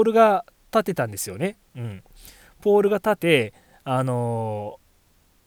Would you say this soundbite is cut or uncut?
cut